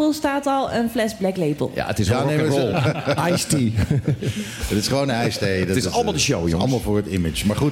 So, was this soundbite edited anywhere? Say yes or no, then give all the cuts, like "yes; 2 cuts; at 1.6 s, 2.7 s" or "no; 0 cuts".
yes; 1 cut; at 2.7 s